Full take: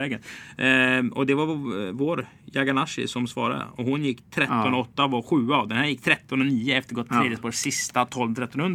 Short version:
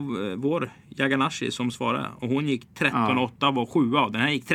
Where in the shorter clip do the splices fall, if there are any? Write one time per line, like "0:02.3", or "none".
none